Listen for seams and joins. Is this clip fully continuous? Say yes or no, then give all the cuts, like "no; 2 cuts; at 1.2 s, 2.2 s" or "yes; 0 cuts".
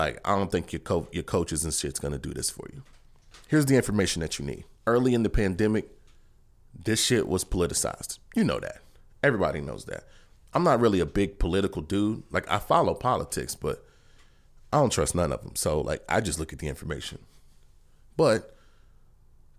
no; 1 cut; at 4.8 s